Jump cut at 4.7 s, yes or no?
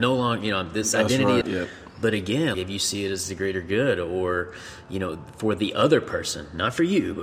no